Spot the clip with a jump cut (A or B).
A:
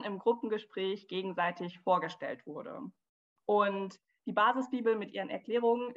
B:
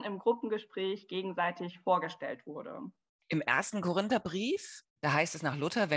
B